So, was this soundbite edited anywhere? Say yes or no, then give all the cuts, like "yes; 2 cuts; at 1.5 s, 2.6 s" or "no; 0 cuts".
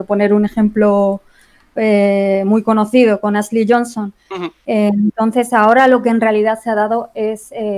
no; 0 cuts